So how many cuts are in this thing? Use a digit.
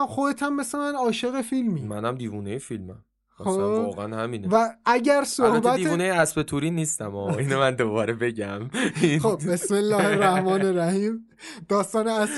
0